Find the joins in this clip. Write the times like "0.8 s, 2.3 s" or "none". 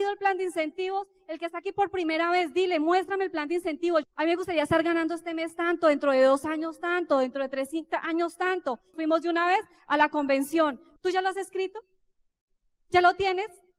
4.0 s, 8.9 s, 11.0 s